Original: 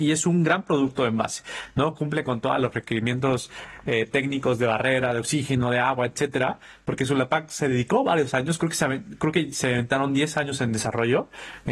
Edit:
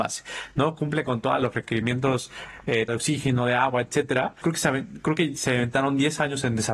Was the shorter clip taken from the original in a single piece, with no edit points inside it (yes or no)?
no